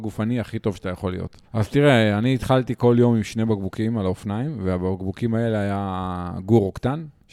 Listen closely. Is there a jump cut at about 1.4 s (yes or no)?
yes